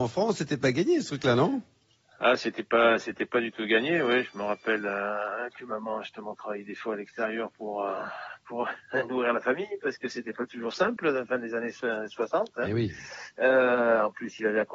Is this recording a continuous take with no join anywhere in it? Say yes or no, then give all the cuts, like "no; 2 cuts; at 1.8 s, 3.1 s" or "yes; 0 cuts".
yes; 0 cuts